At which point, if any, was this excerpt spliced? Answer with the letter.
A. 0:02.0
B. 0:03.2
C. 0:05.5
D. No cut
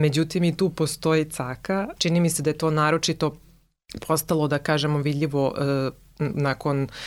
A